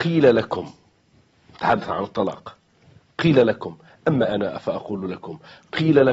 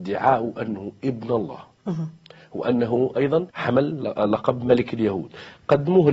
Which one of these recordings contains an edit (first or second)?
second